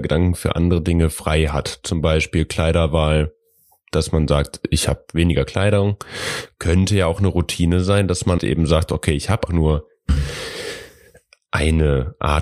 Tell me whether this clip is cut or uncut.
cut